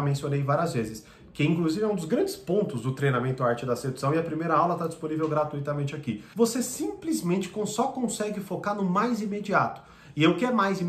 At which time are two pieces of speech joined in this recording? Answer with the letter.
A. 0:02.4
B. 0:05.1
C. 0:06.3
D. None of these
C